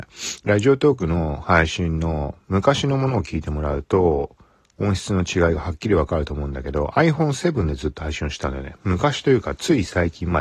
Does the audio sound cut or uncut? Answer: uncut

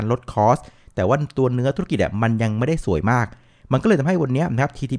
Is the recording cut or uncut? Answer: uncut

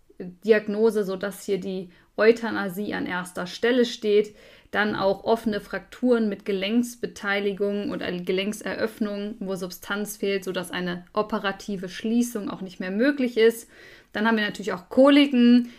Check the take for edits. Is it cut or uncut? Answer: uncut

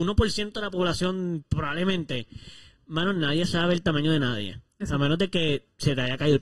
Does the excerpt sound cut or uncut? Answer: uncut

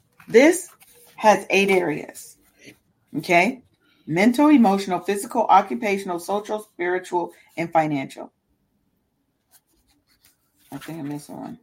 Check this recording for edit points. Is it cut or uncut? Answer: uncut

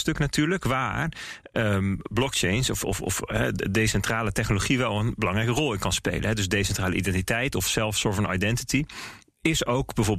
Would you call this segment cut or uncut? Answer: uncut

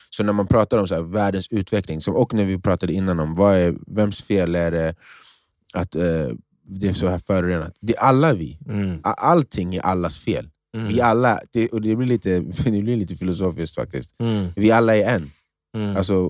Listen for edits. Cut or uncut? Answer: uncut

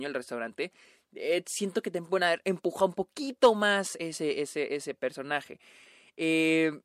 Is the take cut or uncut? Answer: uncut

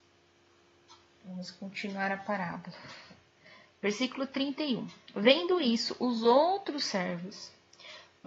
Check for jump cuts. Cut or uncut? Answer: uncut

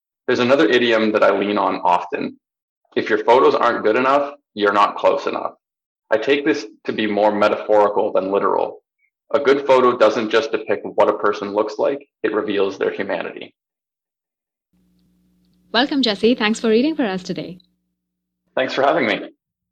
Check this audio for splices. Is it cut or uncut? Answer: uncut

